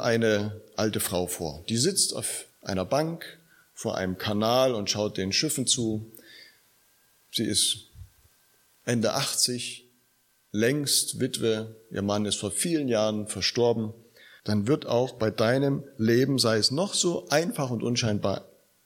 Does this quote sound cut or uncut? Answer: cut